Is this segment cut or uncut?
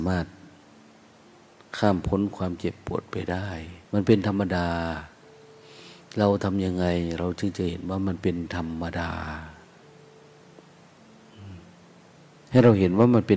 cut